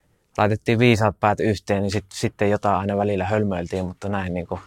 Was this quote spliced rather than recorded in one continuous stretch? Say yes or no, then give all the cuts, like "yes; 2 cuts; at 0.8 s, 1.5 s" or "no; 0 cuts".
no; 0 cuts